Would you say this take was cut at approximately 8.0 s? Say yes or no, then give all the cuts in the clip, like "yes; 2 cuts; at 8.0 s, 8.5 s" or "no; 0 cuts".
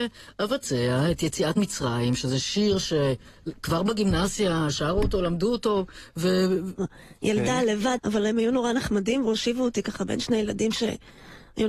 yes; 2 cuts; at 6.8 s, 8.0 s